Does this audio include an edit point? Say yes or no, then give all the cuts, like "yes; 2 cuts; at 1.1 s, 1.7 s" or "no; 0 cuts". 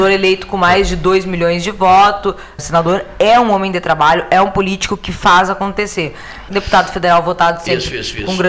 yes; 2 cuts; at 2.6 s, 6.5 s